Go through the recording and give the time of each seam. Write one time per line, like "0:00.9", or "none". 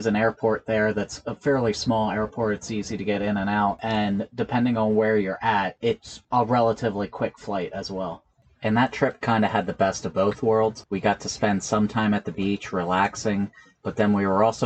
none

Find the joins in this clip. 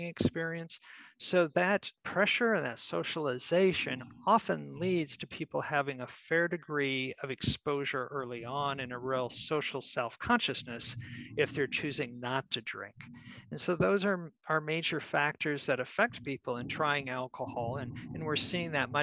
none

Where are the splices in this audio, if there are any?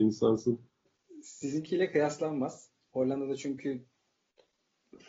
none

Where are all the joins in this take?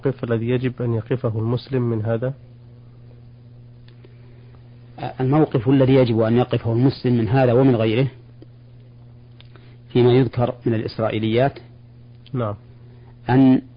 none

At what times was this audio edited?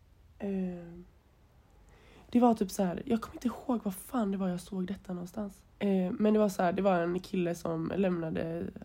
0:05.7

